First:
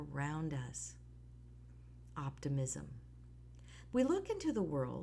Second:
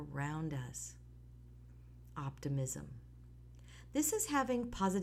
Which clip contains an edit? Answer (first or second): first